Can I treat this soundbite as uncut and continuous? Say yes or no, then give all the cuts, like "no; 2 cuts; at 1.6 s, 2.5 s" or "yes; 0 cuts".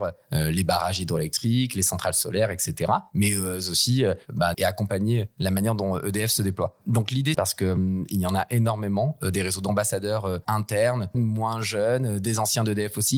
no; 3 cuts; at 4.5 s, 7.3 s, 11.1 s